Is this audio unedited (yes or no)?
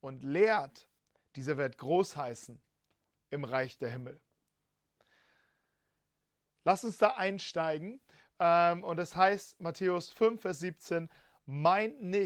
no